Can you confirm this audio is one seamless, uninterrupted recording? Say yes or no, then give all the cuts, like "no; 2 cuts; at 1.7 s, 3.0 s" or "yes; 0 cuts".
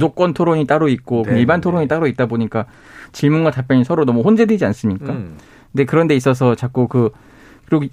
yes; 0 cuts